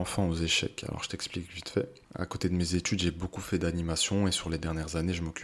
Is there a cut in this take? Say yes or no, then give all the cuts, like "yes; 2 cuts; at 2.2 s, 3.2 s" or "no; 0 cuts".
no; 0 cuts